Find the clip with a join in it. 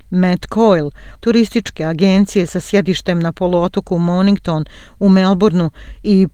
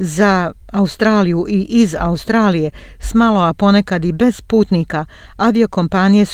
first; 1 cut; at 1.1 s

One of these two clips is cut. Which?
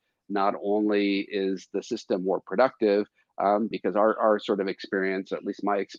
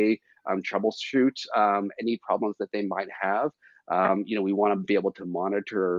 first; 1 cut; at 3.7 s

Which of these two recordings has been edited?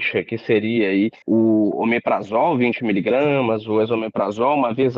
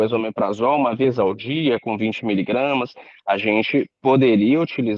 first; 1 cut; at 1.2 s

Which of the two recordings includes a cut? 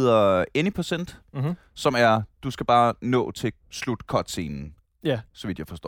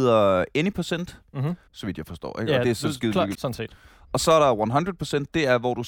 second; 2 cuts; at 1.7 s, 3.3 s

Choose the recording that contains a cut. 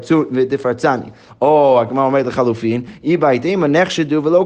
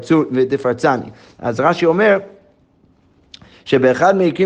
first; 1 cut; at 1.3 s

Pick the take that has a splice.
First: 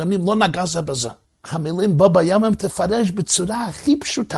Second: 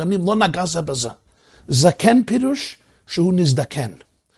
first; 1 cut; at 1.2 s

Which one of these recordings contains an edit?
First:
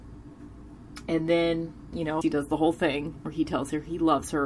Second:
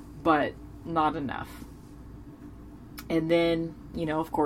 first; 1 cut; at 2.2 s

